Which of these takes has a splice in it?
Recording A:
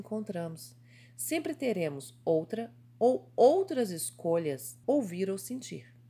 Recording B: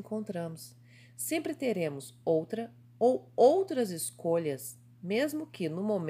A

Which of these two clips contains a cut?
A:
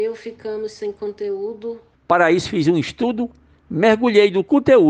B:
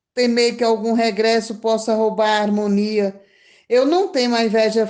A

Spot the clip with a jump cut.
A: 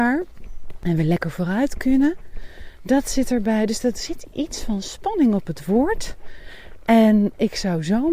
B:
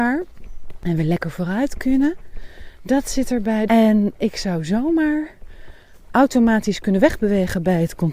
B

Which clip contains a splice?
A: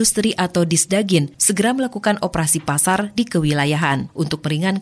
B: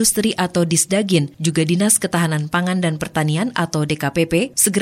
A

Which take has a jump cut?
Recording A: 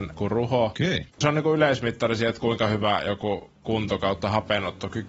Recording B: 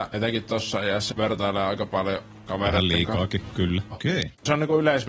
B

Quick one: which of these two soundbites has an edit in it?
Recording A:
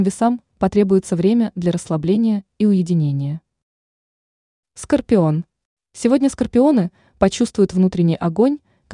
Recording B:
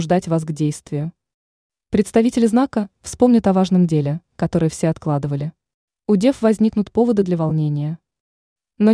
B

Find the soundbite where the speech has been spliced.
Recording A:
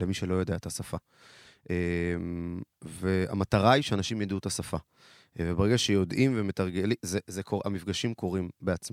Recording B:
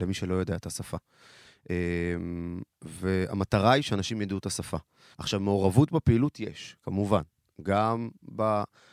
B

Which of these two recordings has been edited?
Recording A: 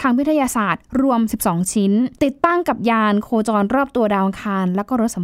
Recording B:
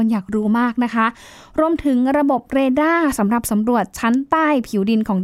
A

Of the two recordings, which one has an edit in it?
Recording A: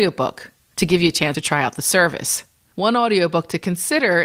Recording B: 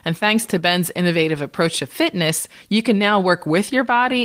A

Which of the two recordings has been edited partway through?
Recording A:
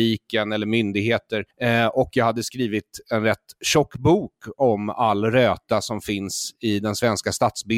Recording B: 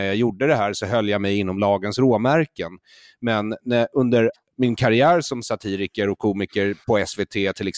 A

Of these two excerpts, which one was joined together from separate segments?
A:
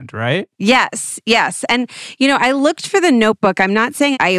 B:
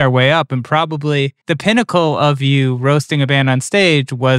B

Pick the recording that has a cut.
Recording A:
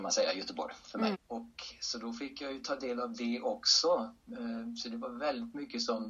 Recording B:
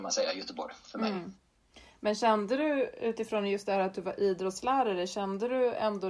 A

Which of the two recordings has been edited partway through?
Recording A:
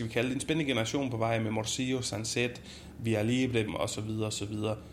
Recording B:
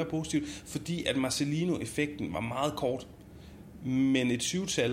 A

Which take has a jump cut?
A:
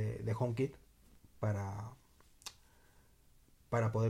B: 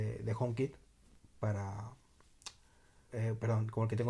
B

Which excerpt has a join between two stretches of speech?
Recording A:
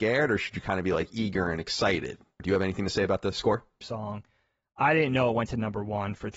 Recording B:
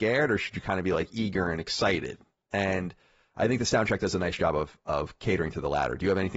A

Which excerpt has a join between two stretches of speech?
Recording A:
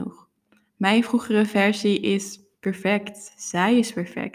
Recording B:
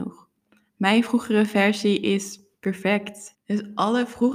B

